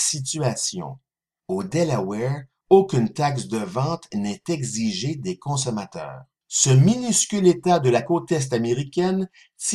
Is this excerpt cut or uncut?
cut